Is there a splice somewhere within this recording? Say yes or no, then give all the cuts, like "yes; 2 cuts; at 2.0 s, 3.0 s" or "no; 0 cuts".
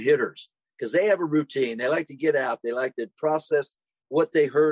no; 0 cuts